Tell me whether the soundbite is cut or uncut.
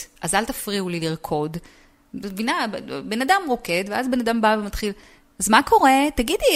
uncut